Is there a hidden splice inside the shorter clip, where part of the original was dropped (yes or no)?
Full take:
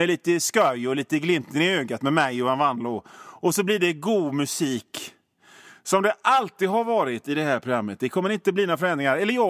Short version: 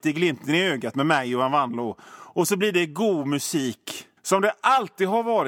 yes